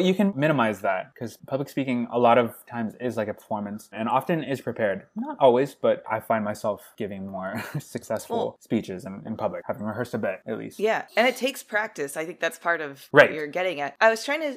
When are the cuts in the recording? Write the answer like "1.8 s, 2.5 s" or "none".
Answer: none